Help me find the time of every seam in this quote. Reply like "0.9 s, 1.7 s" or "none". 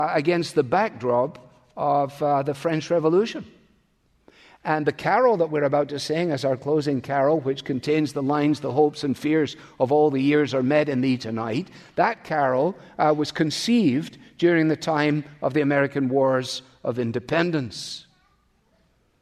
none